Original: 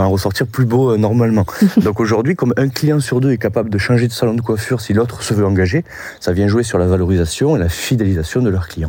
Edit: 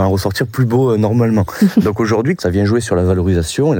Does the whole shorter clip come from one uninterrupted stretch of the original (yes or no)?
no